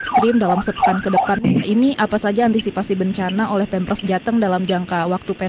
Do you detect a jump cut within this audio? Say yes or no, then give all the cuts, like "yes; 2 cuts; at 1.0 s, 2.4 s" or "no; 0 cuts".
yes; 1 cut; at 1.6 s